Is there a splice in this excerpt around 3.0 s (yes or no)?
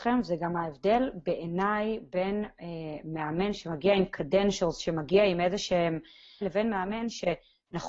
no